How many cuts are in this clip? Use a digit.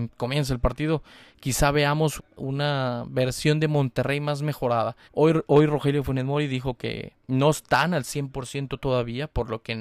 3